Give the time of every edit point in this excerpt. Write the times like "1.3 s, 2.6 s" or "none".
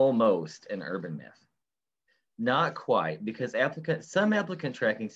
none